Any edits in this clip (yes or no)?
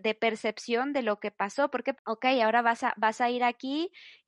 yes